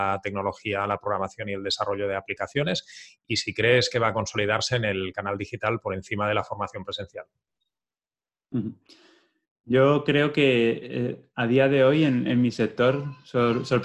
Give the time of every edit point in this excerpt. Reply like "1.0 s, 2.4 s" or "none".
none